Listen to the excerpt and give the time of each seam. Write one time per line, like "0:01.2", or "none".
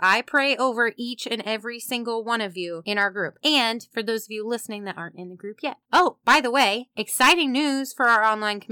none